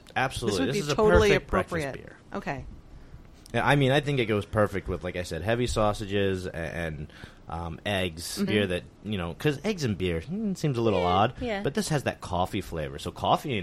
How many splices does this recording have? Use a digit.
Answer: 1